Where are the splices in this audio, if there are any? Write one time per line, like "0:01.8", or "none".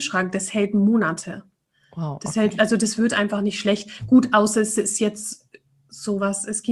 none